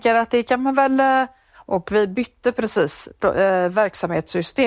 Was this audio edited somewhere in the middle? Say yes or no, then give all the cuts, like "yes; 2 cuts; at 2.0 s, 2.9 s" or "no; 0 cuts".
yes; 1 cut; at 1.4 s